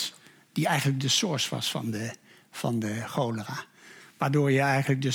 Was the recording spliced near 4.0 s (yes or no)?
yes